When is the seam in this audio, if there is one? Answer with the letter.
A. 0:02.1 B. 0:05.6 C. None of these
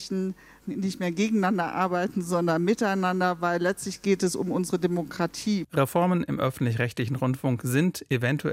B